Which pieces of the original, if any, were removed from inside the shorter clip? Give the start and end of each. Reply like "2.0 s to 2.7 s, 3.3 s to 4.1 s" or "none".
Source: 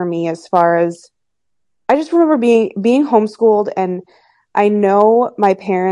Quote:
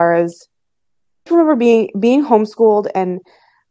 1.9 s to 2.1 s